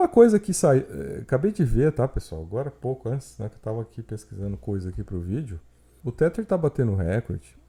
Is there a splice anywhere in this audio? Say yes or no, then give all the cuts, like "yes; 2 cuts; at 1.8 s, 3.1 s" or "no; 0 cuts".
yes; 1 cut; at 6.0 s